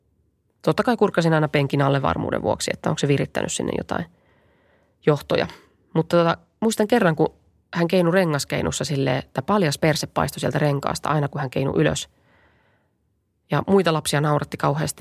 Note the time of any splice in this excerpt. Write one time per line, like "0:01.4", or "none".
none